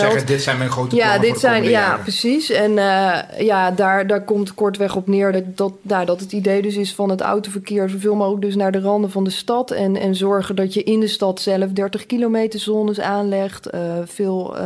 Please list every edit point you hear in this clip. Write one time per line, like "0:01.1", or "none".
none

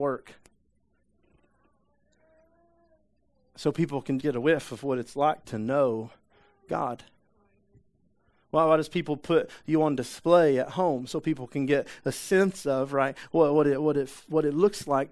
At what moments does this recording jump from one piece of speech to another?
0:04.2

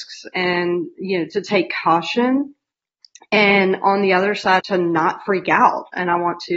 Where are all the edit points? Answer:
0:04.6

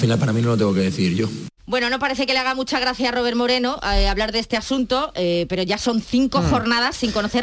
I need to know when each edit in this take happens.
0:01.6

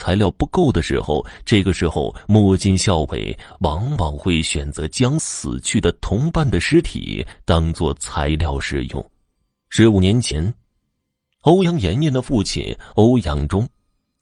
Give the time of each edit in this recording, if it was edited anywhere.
none

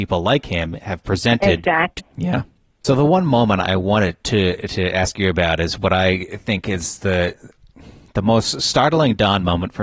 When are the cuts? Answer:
0:02.0

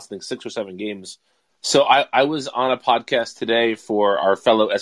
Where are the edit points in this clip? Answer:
0:01.5

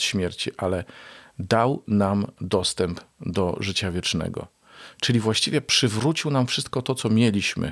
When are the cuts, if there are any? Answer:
none

